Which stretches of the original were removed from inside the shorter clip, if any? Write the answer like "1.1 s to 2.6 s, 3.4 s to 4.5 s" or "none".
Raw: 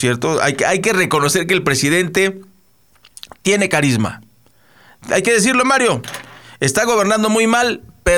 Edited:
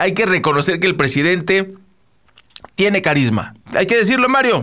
4.3 s to 5.0 s